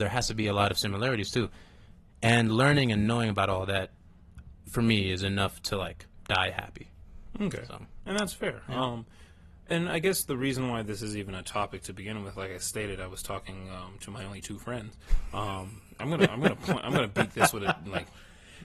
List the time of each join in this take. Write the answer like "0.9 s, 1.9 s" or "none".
none